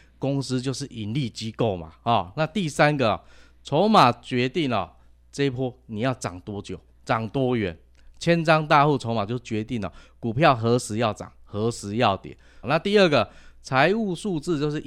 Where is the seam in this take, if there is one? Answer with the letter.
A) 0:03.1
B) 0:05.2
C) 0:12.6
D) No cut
C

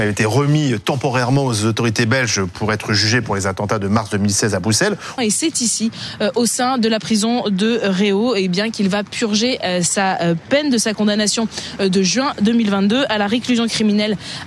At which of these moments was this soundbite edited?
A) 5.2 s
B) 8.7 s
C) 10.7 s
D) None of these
A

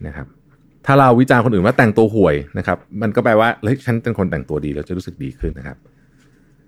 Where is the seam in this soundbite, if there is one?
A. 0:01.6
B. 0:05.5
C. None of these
B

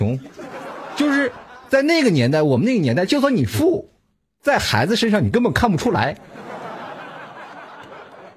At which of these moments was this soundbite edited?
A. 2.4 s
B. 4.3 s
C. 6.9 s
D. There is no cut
D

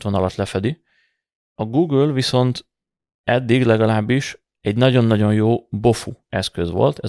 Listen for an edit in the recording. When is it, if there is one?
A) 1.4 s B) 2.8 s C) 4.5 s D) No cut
D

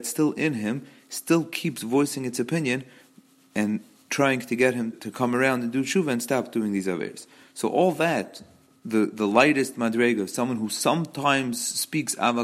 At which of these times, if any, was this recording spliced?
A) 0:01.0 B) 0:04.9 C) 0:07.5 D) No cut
B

